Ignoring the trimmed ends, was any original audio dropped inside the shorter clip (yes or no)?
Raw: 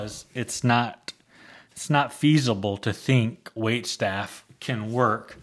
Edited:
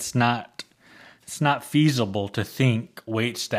no